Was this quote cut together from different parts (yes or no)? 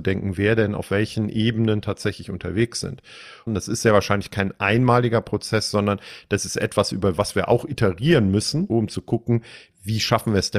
yes